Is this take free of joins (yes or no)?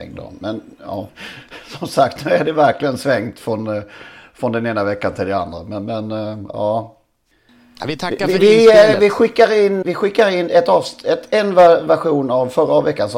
no